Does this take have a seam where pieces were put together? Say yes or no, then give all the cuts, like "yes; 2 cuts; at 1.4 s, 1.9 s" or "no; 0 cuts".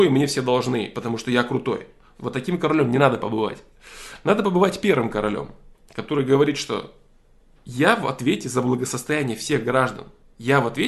no; 0 cuts